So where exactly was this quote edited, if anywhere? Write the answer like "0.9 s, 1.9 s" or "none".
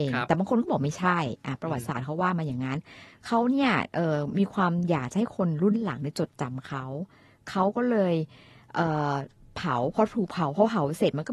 none